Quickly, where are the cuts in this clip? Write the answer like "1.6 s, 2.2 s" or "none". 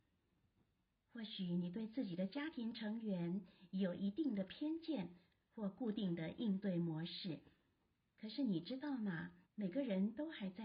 9.4 s